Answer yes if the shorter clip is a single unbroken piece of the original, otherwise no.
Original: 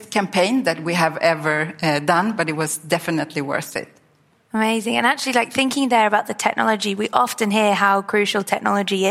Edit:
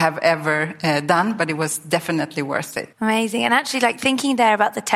no